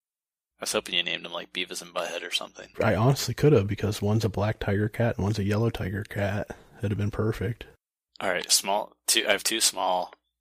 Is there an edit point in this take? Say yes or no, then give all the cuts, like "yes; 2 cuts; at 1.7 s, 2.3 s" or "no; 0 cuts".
yes; 1 cut; at 2.7 s